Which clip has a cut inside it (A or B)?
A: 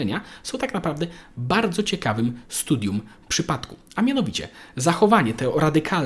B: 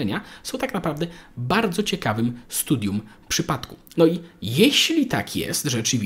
B